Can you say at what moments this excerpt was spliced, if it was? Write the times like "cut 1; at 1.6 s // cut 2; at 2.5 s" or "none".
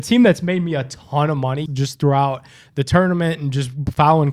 cut 1; at 1.7 s